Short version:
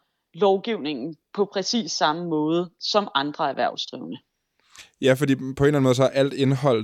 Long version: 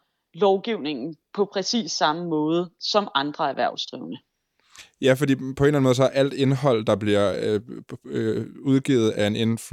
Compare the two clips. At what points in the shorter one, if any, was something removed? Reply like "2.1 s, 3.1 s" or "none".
none